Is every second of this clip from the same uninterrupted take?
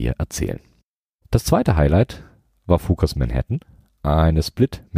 yes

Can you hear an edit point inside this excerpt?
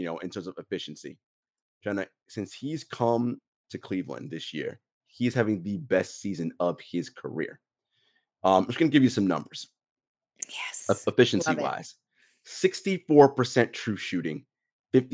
no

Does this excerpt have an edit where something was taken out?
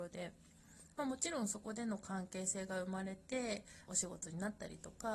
yes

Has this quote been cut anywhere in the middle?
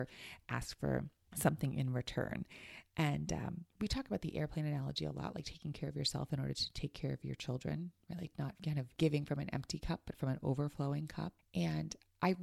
no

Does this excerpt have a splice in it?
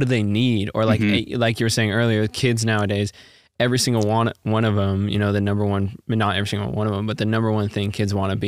no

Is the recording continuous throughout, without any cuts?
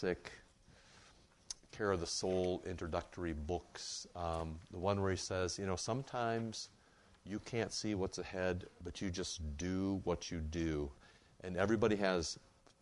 yes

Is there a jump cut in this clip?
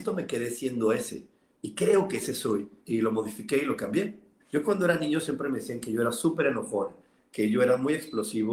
yes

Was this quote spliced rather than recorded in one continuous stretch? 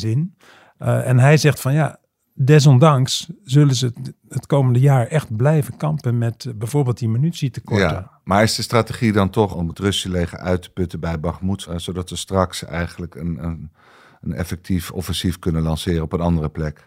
no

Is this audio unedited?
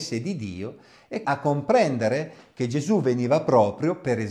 no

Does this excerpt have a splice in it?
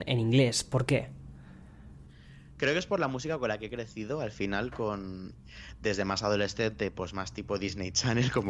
no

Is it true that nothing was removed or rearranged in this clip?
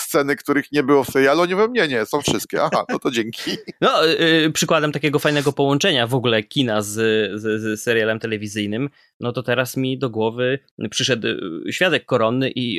yes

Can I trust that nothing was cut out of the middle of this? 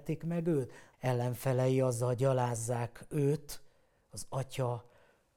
no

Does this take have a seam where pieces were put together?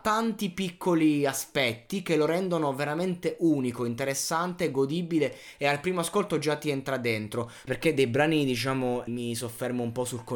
yes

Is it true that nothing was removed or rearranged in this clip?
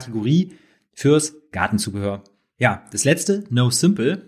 yes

